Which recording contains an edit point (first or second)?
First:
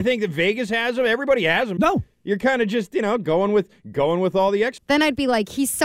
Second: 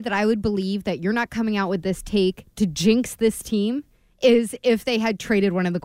first